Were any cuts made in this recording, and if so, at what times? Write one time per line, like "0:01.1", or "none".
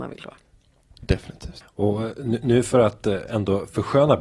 0:01.6